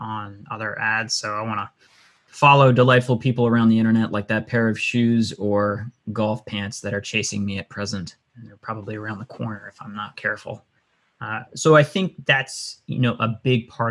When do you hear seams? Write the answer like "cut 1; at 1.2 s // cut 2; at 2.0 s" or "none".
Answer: none